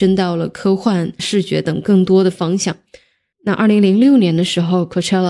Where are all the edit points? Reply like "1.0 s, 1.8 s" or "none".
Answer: 1.2 s, 3.3 s